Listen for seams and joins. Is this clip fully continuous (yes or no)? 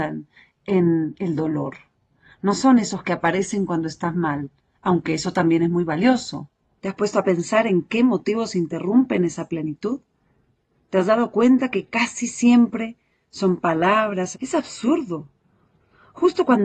no